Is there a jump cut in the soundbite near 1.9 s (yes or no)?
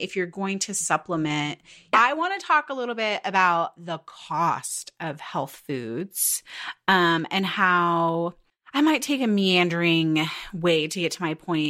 yes